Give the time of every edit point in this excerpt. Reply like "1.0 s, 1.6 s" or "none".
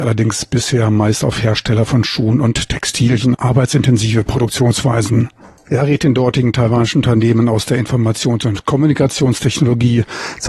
3.3 s, 5.7 s